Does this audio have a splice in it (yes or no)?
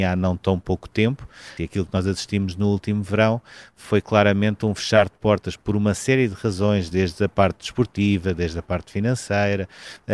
yes